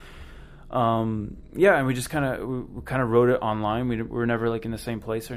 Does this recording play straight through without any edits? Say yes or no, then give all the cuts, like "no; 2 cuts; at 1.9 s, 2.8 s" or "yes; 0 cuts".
yes; 0 cuts